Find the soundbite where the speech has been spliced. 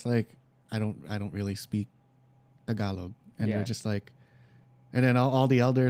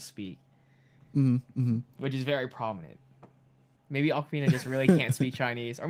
second; 1 cut; at 3.8 s

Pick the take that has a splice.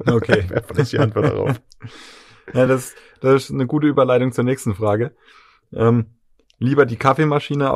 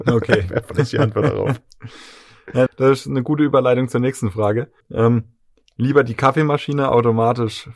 second; 2 cuts; at 2.7 s, 4.8 s

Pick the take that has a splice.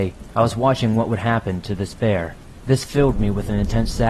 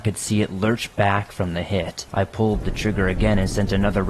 second; 1 cut; at 2.1 s

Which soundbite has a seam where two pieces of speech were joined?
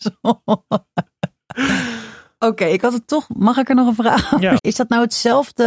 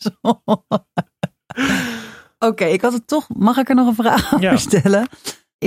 first; 1 cut; at 4.6 s

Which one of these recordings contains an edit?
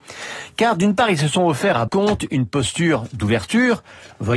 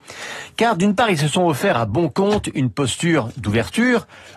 first; 1 cut; at 1.9 s

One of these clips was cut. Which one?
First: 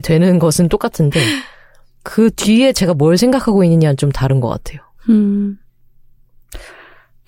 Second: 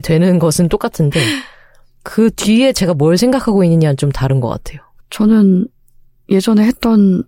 second; 1 cut; at 5.0 s

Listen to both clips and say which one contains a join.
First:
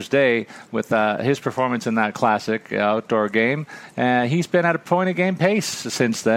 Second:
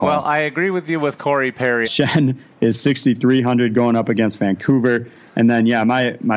second; 1 cut; at 1.8 s

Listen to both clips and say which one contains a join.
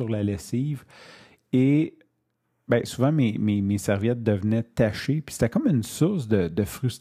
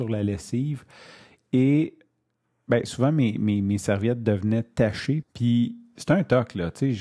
second; 1 cut; at 5.2 s

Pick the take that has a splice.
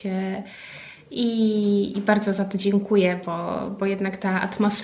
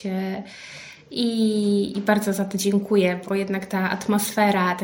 second; 1 cut; at 3.3 s

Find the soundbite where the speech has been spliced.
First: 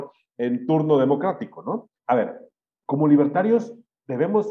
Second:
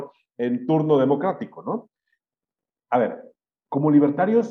first; 1 cut; at 2.0 s

